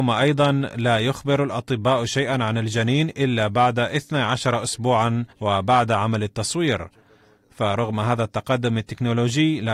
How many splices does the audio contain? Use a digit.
1